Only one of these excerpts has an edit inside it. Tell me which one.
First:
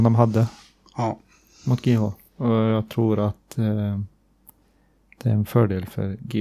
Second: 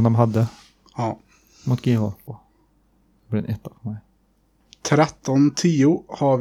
second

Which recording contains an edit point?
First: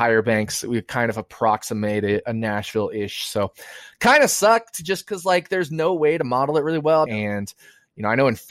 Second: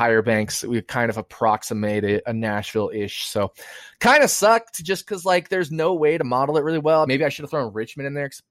first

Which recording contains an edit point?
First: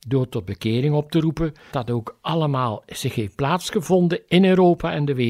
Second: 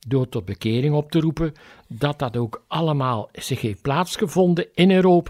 first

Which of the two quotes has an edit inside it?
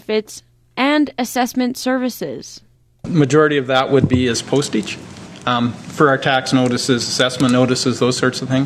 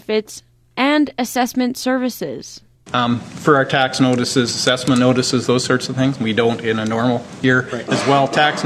second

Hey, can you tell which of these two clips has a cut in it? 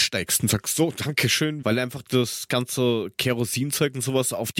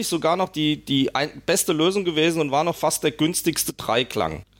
first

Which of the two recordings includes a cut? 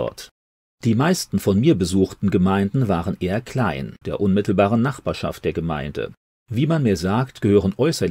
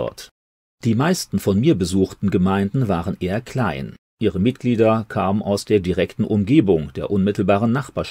first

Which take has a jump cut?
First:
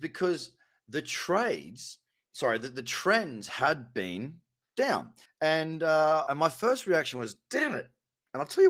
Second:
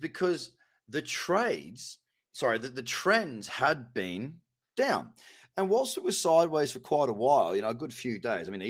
first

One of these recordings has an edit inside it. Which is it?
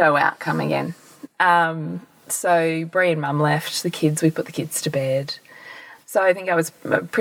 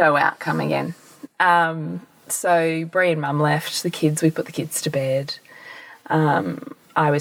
first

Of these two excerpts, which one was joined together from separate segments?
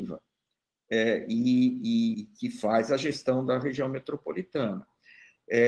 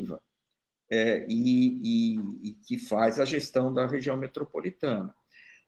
first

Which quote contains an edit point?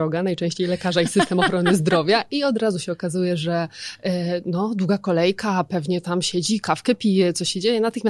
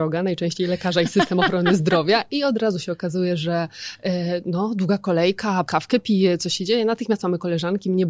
second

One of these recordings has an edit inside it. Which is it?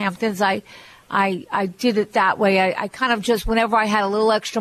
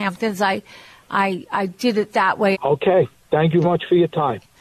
second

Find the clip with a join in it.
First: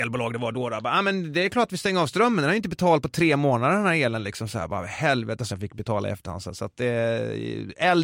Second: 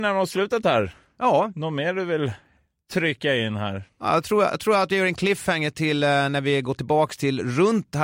first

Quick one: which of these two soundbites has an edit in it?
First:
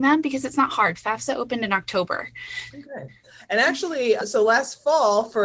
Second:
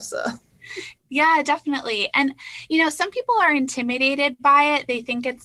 first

